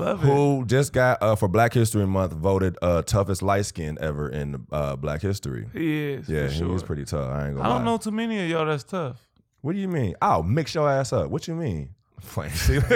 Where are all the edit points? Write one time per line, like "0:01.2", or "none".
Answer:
none